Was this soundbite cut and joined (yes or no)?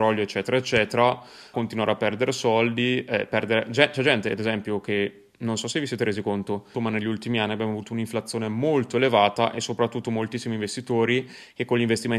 yes